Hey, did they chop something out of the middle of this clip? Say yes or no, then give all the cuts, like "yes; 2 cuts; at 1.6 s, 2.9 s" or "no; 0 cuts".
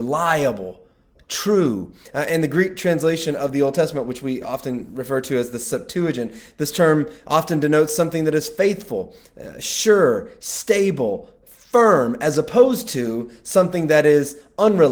no; 0 cuts